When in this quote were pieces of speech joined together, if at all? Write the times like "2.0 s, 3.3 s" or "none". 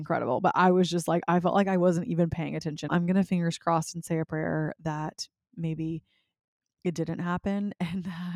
2.9 s